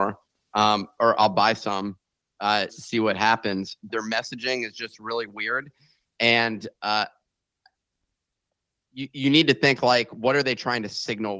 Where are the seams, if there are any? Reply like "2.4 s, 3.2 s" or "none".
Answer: 2.7 s, 3.9 s